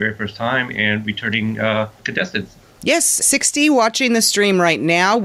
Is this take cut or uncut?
cut